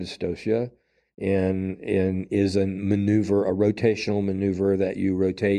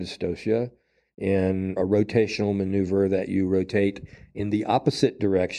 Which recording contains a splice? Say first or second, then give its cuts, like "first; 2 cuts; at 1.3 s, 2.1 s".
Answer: second; 1 cut; at 1.8 s